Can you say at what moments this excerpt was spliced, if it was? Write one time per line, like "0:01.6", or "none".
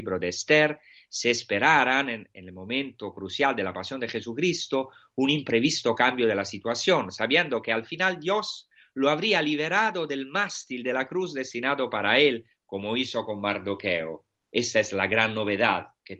0:14.4

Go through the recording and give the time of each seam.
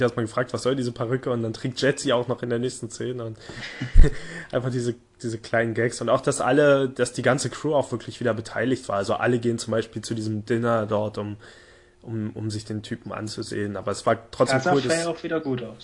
0:03.9

